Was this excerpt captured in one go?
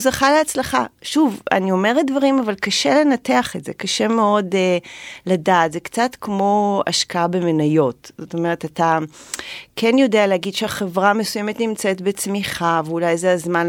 yes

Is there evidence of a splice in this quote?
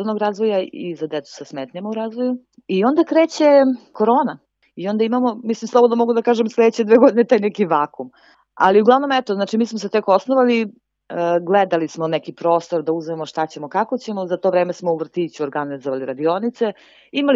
no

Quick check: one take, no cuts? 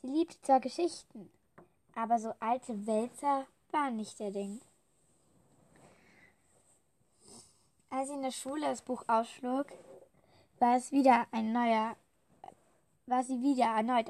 yes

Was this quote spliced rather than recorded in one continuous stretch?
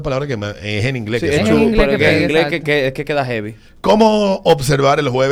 no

